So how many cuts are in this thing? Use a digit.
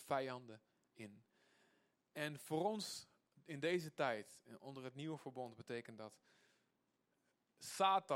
0